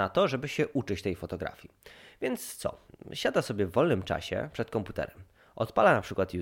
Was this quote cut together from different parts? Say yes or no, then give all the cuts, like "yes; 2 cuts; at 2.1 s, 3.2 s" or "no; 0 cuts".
no; 0 cuts